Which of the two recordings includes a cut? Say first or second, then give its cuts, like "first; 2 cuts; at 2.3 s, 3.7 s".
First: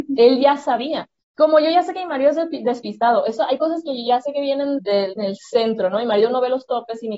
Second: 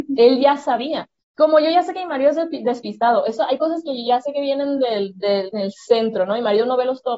first; 1 cut; at 4.8 s